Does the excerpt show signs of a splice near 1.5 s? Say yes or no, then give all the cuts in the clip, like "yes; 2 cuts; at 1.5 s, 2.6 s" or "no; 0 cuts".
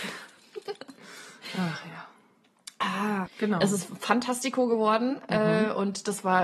no; 1 cut; at 3.3 s